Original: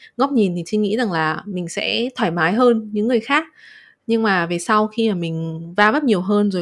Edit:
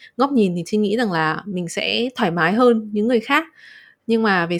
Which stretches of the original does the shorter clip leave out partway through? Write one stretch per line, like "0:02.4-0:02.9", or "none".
none